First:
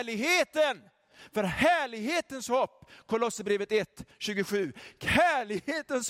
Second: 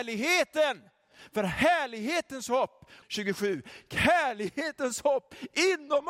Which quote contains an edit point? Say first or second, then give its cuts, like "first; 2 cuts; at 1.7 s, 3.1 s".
second; 1 cut; at 3.0 s